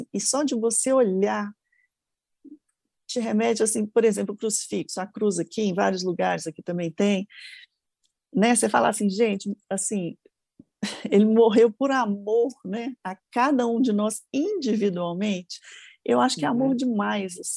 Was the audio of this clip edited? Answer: no; 0 cuts

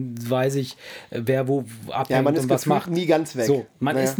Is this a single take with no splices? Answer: yes; 0 cuts

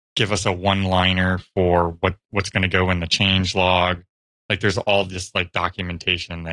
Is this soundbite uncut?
yes; 0 cuts

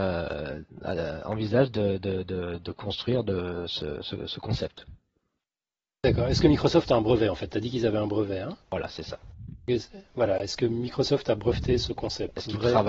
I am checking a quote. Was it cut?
no; 0 cuts

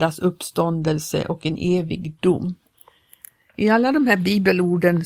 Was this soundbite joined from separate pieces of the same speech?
no; 0 cuts

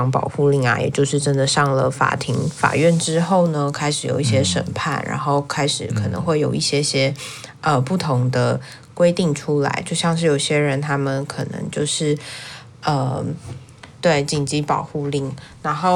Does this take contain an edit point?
yes; 2 cuts; at 12.7 s, 14.0 s

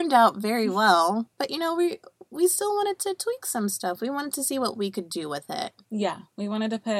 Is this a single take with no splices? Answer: yes; 0 cuts

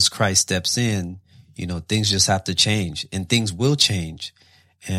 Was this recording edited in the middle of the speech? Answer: no; 0 cuts

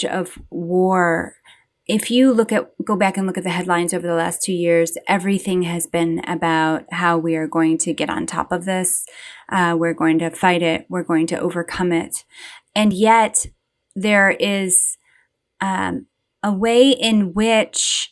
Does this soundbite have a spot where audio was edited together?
no; 0 cuts

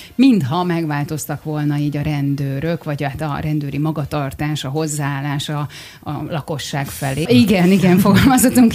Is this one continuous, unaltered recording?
no; 1 cut; at 7.3 s

